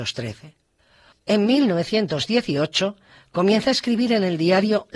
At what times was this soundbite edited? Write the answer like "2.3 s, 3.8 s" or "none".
1.1 s

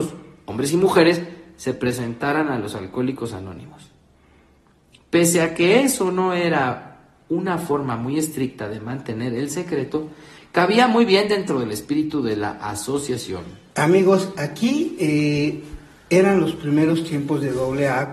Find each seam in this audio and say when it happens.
13.7 s

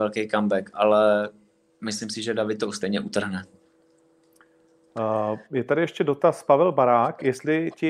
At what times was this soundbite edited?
none

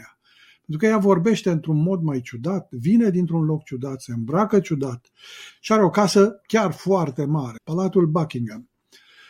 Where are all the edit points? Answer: 5.5 s, 7.6 s

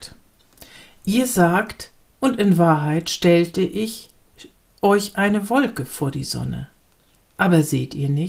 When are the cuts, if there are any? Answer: 2.0 s

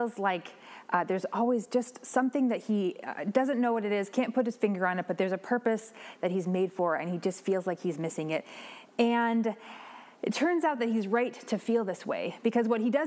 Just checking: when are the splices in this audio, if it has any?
none

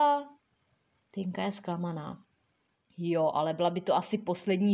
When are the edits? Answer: none

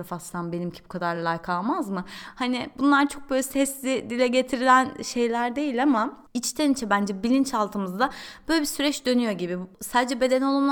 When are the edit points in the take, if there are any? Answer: none

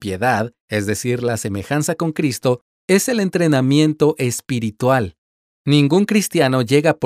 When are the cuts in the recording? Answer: none

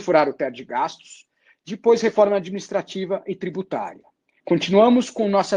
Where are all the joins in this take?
4.4 s

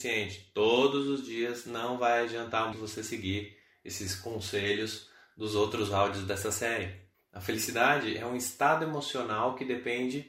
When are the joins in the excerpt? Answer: 2.7 s, 7.1 s

